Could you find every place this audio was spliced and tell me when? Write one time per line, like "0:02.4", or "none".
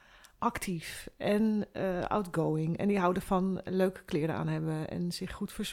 none